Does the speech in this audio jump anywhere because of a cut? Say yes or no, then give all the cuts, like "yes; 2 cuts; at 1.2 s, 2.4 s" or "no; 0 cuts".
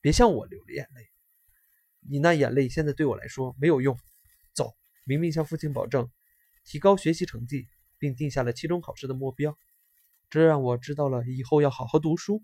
yes; 2 cuts; at 4.9 s, 10.2 s